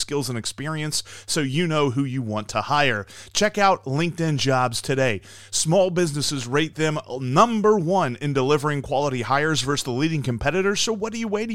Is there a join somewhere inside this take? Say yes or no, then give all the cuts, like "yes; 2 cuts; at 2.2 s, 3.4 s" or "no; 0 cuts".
no; 0 cuts